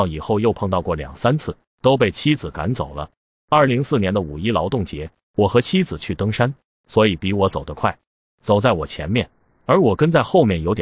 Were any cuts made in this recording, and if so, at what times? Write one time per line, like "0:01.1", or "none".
0:03.7
0:06.8